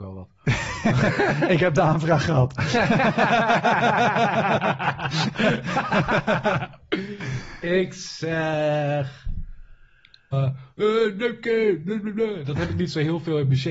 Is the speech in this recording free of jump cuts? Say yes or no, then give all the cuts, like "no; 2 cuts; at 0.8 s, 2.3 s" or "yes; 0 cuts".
no; 1 cut; at 10.3 s